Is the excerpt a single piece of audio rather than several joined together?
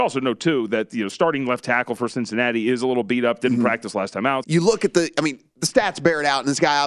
no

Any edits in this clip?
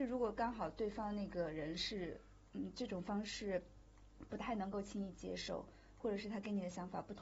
no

